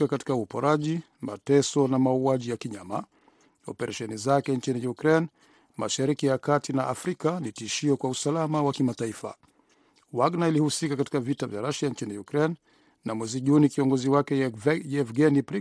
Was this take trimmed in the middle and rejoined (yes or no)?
no